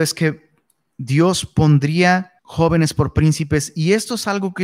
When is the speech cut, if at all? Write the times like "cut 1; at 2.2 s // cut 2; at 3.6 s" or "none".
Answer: cut 1; at 2.4 s

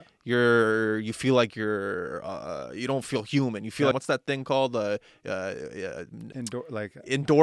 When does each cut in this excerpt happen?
cut 1; at 3.9 s // cut 2; at 6.3 s

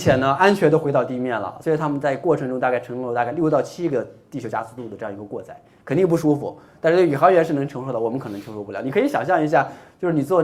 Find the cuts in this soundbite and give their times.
none

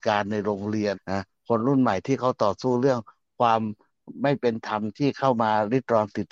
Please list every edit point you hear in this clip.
cut 1; at 0.9 s

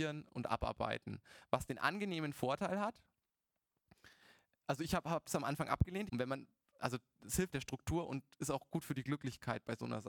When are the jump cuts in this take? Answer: cut 1; at 6.1 s // cut 2; at 7.5 s

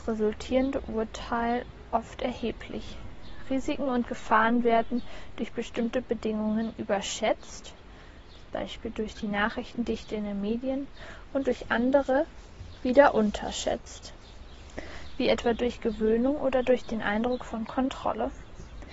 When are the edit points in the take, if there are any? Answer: none

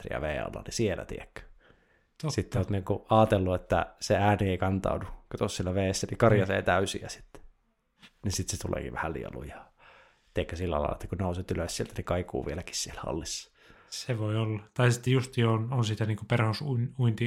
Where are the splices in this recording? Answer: none

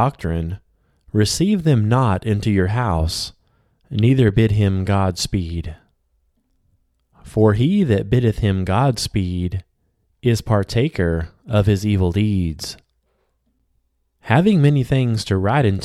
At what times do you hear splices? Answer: none

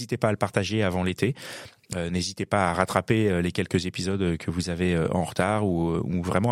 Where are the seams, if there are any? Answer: none

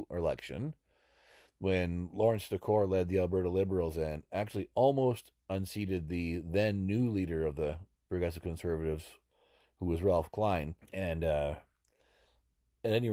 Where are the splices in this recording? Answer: cut 1; at 10.8 s

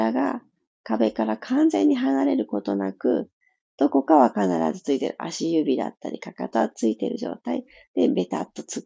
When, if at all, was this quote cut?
none

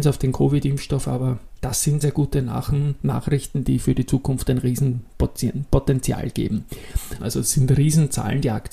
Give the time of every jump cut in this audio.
cut 1; at 2.0 s // cut 2; at 7.2 s

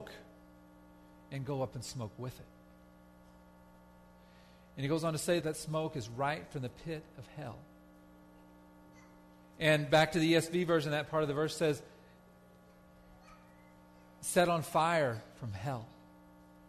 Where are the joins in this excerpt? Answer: cut 1; at 5.4 s

